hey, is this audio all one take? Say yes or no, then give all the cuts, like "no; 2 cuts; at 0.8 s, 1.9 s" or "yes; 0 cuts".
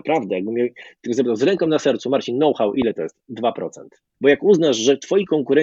no; 1 cut; at 4.1 s